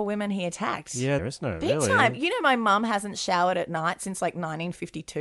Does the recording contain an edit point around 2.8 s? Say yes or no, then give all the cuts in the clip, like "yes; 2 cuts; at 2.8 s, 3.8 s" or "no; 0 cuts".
no; 1 cut; at 1.2 s